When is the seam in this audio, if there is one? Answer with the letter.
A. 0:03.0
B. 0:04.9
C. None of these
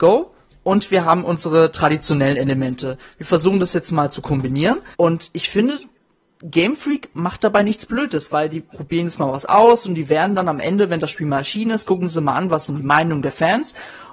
B